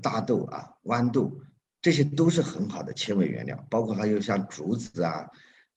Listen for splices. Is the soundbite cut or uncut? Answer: cut